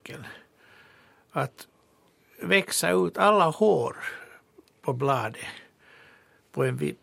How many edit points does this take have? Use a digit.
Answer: 0